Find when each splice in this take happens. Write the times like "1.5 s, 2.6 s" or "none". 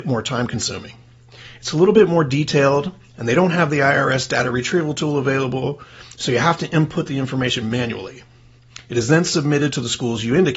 none